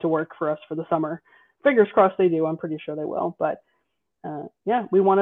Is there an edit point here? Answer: no; 0 cuts

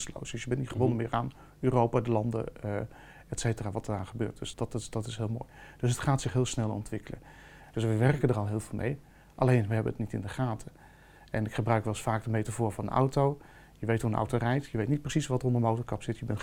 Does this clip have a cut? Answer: yes; 2 cuts; at 4.5 s, 7.6 s

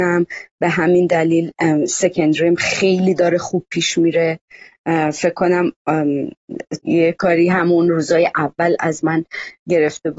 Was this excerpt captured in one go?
no; 1 cut; at 6.8 s

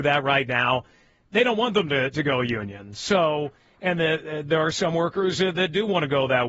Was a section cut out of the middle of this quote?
no; 0 cuts

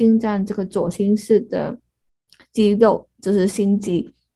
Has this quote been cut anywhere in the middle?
no; 0 cuts

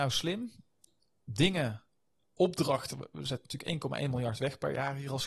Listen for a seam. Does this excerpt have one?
no; 0 cuts

